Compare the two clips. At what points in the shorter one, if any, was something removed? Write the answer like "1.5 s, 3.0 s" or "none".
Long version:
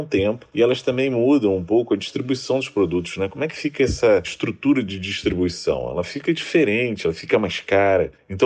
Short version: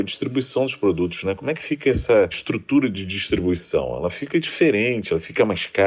none